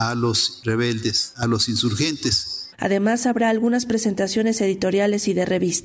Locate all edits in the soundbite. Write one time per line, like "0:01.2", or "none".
0:02.7